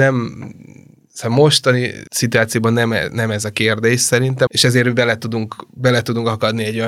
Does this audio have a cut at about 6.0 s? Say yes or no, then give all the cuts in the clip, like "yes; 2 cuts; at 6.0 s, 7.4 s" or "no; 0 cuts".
no; 2 cuts; at 2.1 s, 4.5 s